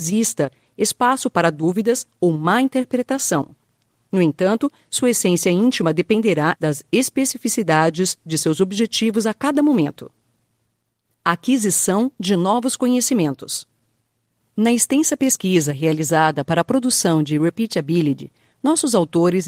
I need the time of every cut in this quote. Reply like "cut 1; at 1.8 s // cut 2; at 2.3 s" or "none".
cut 1; at 6.6 s